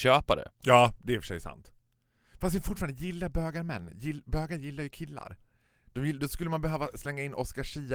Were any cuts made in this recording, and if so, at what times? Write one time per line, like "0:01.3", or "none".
none